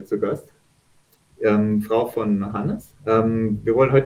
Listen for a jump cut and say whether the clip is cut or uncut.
cut